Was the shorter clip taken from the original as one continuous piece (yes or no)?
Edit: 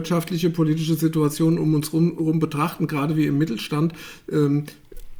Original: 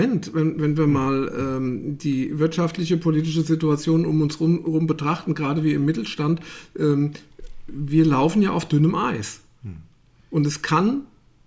yes